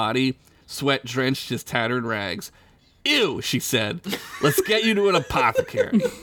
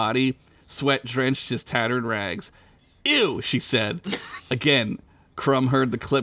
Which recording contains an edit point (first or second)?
second